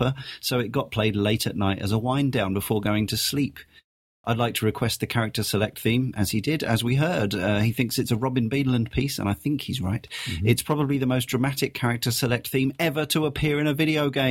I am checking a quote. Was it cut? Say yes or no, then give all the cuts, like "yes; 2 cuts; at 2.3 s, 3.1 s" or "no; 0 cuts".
no; 0 cuts